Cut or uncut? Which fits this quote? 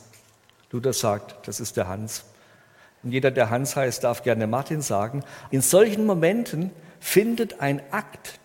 cut